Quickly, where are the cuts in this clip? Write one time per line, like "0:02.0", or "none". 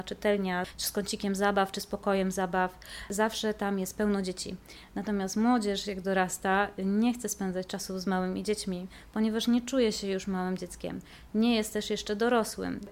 none